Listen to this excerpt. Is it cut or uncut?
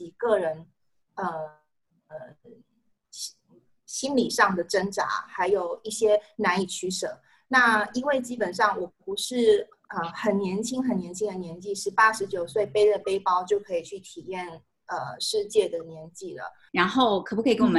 cut